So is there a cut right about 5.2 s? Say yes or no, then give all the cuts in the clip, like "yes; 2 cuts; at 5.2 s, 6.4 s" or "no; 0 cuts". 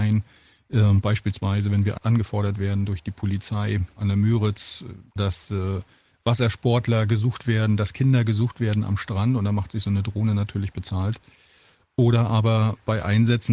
yes; 1 cut; at 5.2 s